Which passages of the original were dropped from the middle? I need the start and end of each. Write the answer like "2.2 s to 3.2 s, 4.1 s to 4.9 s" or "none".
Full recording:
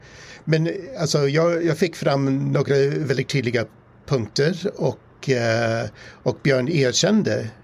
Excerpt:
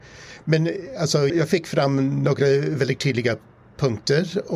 1.3 s to 1.6 s

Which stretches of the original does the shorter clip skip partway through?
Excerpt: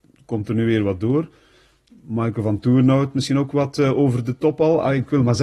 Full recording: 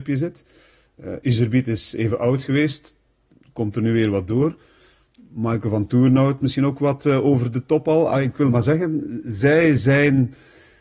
none

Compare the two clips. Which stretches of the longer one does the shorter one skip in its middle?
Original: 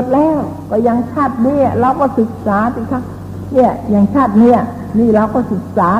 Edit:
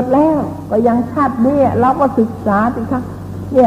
none

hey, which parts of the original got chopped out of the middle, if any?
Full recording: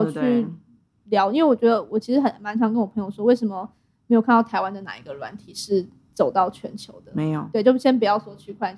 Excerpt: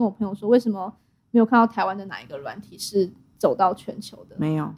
none

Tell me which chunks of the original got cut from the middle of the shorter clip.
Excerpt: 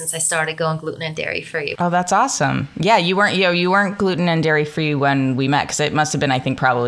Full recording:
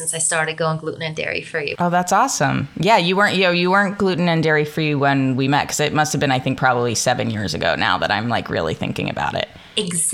none

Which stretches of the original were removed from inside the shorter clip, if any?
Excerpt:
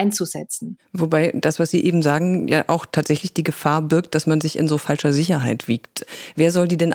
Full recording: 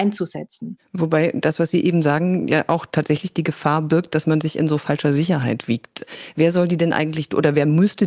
none

